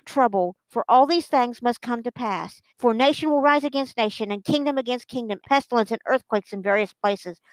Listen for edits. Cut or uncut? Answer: cut